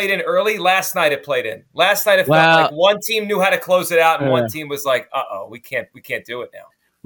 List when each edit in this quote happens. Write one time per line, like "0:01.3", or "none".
none